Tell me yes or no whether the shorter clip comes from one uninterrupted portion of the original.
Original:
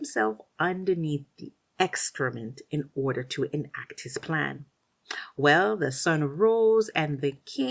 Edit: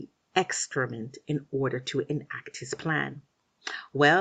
yes